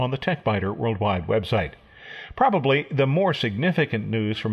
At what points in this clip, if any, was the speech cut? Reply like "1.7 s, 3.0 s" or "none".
none